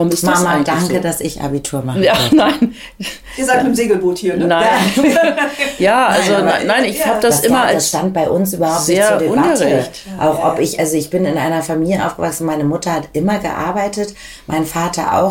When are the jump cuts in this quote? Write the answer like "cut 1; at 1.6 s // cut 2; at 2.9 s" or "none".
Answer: none